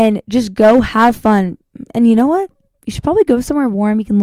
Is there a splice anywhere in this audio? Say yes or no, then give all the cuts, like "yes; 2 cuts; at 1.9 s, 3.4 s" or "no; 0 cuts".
no; 0 cuts